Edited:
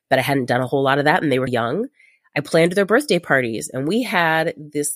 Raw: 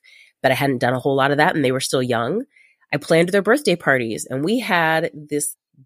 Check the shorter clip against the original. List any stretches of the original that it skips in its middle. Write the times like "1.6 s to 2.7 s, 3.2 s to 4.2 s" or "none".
1.8 s to 2.0 s